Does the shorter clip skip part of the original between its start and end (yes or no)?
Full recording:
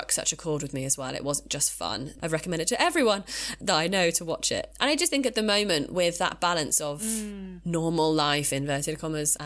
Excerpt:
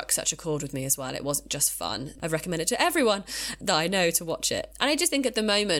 no